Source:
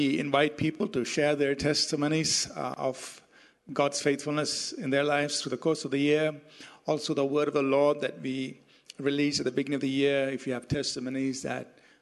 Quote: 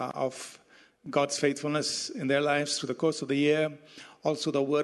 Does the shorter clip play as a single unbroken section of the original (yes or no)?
yes